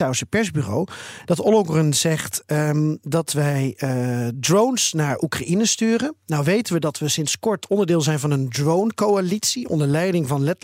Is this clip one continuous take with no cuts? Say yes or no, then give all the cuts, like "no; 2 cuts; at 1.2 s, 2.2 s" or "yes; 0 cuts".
yes; 0 cuts